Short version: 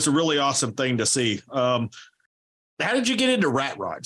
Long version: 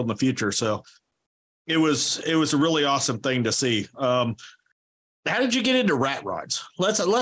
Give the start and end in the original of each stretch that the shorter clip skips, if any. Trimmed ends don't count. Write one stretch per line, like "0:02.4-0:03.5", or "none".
none